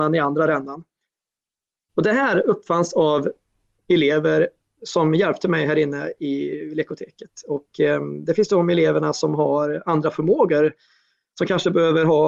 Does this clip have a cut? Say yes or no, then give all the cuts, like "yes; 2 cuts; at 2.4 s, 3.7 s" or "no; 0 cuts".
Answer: yes; 1 cut; at 4.8 s